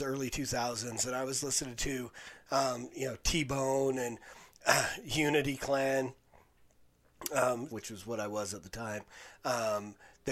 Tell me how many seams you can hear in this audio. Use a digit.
2